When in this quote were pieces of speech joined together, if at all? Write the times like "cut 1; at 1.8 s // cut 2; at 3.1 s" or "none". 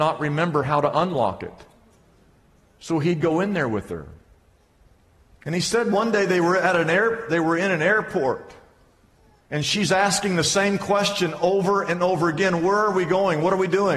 cut 1; at 9.4 s